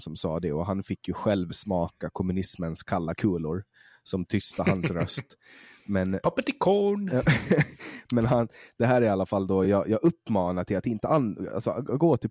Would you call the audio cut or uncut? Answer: uncut